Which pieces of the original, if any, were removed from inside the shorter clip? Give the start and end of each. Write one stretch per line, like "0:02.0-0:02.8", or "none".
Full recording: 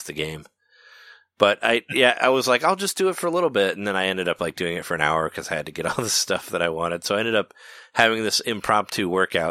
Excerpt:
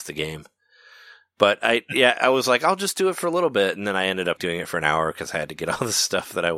0:04.4-0:04.5